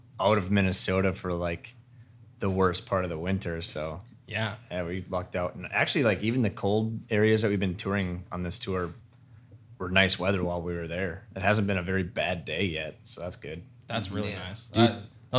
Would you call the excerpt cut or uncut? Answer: uncut